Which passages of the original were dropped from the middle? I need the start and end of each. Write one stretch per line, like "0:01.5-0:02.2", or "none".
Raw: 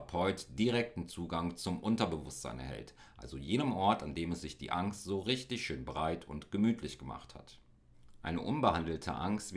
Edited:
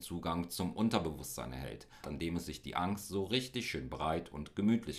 0:03.1-0:04.0

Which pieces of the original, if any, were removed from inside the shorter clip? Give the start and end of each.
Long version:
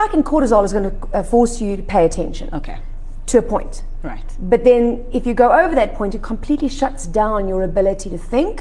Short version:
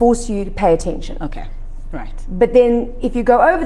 0:03.2-0:04.0

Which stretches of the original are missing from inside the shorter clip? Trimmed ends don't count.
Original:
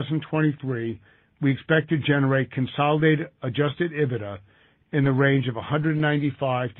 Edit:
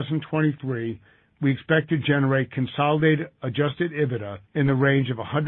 0:04.4-0:04.8

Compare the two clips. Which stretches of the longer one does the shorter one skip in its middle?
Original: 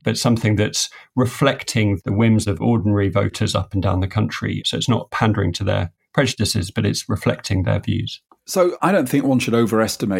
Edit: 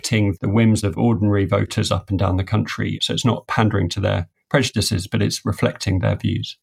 none

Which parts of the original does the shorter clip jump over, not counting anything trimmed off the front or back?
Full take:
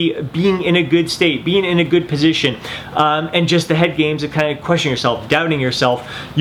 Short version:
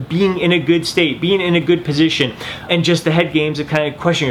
0:02.9-0:03.3

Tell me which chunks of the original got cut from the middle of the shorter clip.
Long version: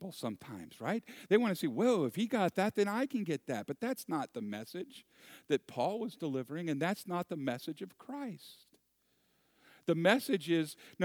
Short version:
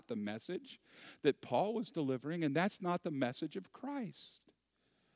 none

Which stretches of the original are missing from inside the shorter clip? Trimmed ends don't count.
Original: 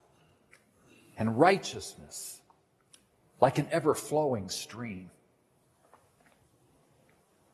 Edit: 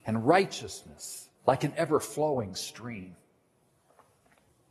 0:02.5-0:03.3

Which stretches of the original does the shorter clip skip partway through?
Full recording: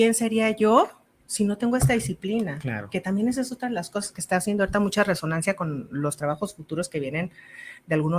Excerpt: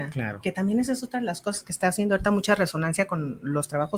none

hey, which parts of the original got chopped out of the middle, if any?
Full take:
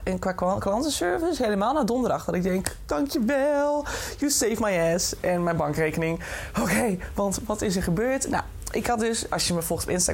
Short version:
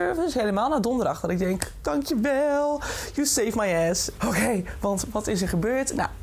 0:05.2-0:06.5

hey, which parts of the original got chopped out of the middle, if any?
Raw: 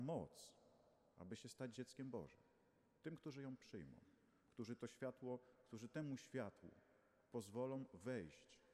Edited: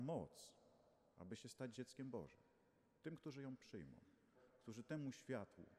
0:04.4-0:05.4

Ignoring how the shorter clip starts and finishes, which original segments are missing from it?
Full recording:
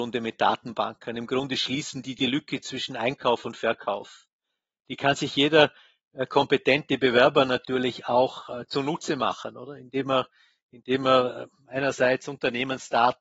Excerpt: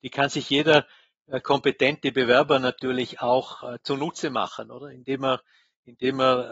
none

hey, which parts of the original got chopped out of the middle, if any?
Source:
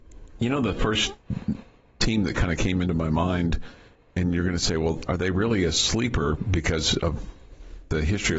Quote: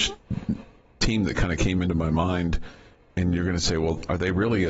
none

